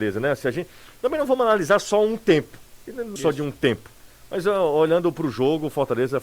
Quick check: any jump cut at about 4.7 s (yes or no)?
no